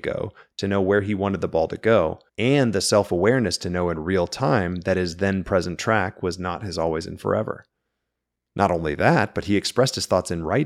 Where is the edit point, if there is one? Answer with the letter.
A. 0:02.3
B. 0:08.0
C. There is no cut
A